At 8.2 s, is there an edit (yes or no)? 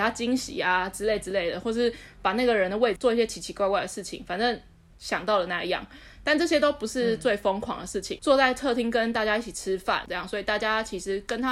yes